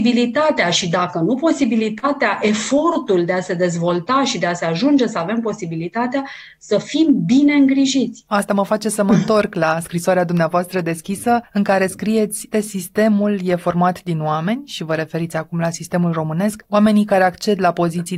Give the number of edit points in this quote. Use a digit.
2